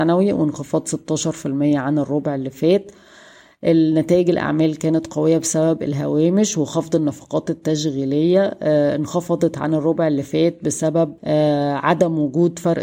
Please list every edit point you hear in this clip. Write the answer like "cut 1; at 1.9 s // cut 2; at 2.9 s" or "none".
cut 1; at 11.2 s